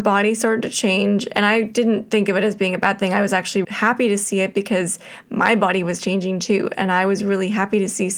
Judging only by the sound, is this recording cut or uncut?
cut